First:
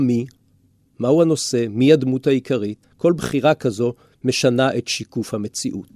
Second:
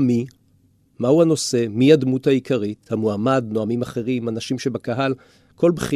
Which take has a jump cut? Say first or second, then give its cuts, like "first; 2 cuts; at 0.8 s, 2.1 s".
first; 1 cut; at 2.8 s